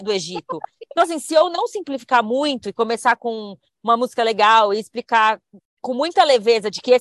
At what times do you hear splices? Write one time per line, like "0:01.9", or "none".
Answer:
0:05.6